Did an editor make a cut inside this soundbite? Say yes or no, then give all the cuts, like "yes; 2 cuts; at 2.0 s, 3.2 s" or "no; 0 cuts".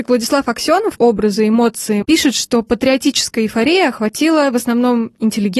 yes; 2 cuts; at 1.0 s, 2.0 s